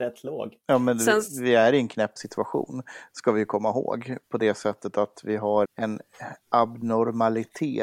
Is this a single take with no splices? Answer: no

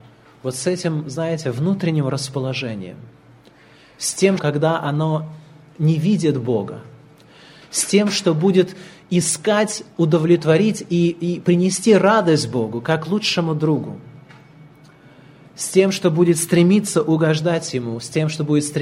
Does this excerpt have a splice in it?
yes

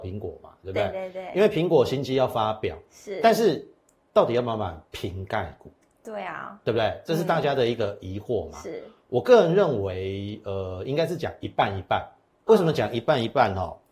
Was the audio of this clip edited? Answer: no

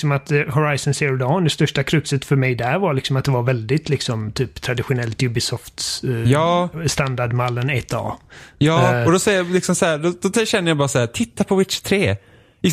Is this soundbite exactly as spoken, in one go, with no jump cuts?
yes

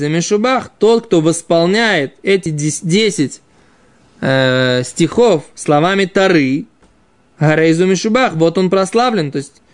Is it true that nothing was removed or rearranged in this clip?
yes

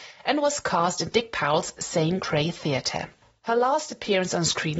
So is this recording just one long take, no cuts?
yes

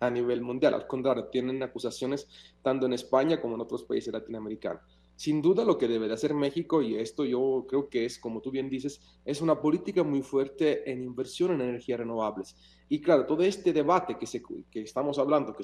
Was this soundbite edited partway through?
no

